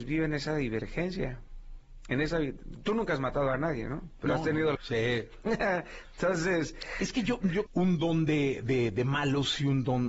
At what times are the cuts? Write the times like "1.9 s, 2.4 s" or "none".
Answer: 4.8 s, 7.7 s